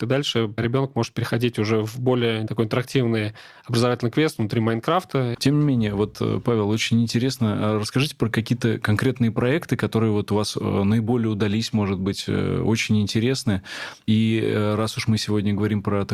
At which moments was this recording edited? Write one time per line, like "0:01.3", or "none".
0:05.3